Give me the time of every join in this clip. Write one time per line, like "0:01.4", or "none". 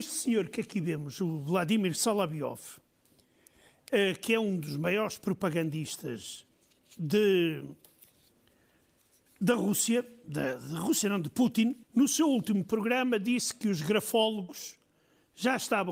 0:11.8